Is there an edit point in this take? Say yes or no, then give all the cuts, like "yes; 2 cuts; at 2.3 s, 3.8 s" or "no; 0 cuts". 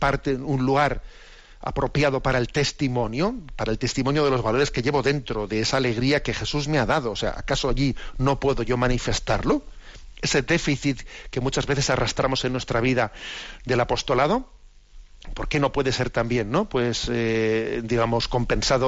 no; 0 cuts